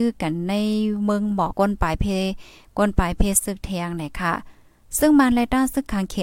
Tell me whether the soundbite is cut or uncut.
cut